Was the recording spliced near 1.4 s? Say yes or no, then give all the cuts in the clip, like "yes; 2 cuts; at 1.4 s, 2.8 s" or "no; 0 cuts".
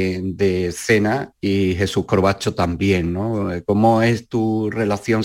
yes; 1 cut; at 1.4 s